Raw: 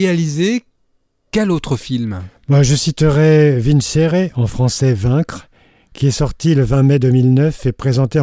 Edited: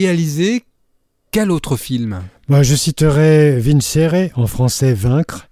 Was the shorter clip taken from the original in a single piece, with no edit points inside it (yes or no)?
yes